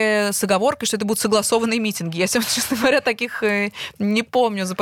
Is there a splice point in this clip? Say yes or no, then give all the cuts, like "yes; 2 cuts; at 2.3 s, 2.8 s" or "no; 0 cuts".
no; 0 cuts